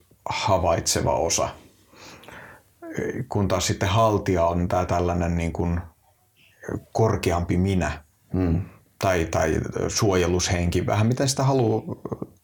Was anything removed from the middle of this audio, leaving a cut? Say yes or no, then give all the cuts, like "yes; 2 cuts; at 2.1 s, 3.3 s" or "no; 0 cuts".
no; 0 cuts